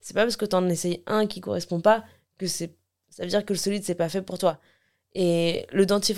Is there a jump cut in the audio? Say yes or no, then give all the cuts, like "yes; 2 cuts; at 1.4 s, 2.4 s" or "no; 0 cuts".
no; 0 cuts